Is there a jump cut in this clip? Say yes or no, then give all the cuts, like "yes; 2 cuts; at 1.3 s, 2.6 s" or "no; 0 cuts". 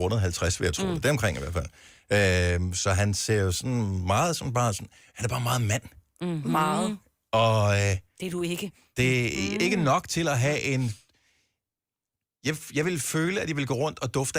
no; 0 cuts